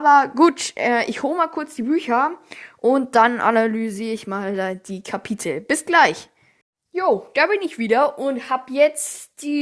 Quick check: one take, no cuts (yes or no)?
yes